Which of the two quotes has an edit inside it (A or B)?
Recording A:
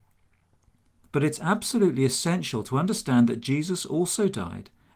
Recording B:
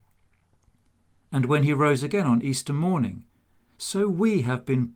A